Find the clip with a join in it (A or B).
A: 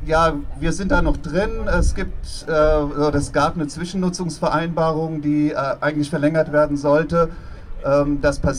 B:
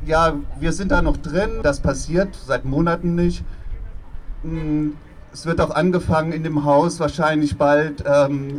B